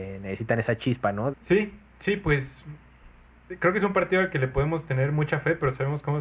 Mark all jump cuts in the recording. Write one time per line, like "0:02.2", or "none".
0:01.3